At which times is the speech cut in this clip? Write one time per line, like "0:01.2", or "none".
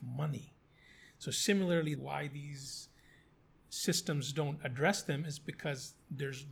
0:02.0